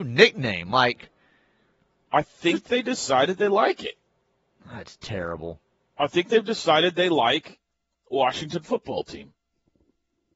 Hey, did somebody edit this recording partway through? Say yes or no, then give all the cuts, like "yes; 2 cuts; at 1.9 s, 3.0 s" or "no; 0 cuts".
no; 0 cuts